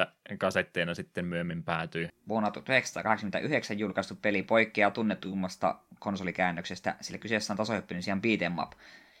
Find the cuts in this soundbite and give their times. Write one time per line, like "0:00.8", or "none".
0:02.1